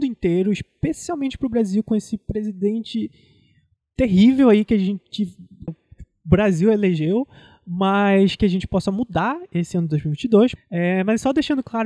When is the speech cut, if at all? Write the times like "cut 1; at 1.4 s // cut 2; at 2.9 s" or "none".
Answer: cut 1; at 5.7 s // cut 2; at 10.6 s